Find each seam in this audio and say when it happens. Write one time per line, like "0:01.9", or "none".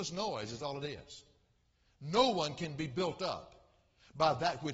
none